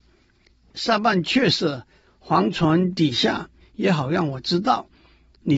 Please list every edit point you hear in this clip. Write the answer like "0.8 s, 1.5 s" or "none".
3.6 s